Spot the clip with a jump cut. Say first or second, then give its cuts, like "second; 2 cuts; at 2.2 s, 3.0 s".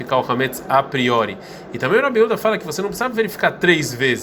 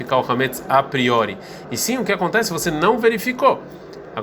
second; 1 cut; at 1.6 s